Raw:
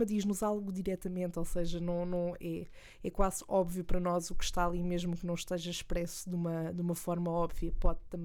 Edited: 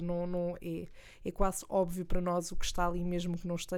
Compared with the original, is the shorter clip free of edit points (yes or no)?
yes